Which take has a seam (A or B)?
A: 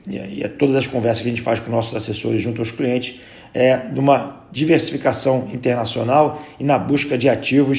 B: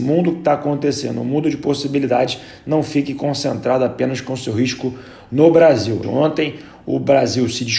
B